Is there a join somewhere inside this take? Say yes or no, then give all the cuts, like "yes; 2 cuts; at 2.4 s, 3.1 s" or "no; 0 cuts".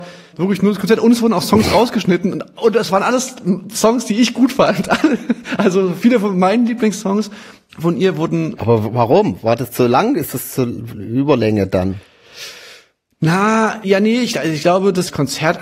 no; 0 cuts